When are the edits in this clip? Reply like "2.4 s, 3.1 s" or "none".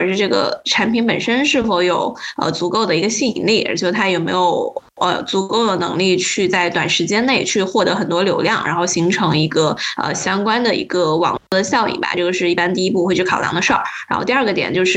none